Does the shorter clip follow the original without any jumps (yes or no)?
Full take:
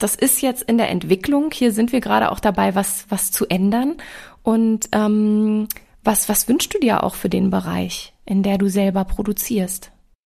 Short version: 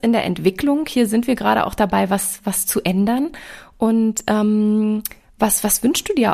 yes